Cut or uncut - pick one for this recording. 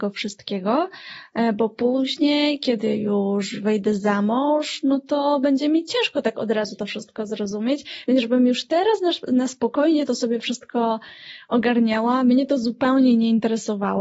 uncut